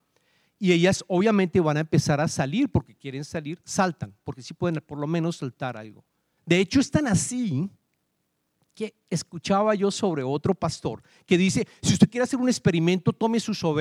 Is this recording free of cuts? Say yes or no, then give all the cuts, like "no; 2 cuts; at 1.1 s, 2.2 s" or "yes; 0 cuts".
no; 1 cut; at 6.4 s